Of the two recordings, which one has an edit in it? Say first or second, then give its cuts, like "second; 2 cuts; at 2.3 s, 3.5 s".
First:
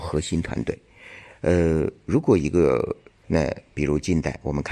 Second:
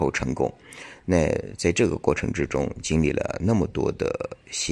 first; 1 cut; at 3.2 s